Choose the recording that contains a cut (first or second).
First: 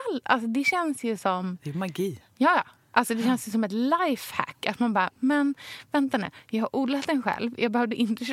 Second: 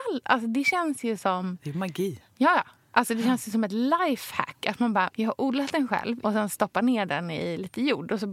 second